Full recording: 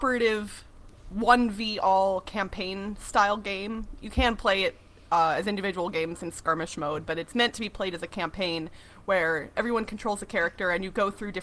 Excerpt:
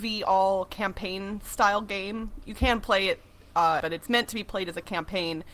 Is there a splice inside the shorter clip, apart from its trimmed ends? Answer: yes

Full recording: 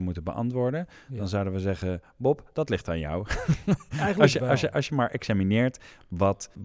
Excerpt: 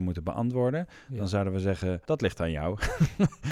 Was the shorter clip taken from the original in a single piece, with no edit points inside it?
no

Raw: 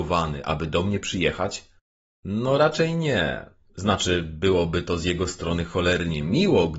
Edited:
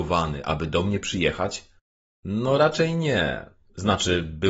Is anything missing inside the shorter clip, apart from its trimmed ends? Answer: no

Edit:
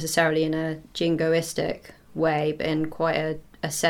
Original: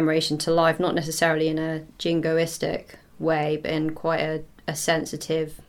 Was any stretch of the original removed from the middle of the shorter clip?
no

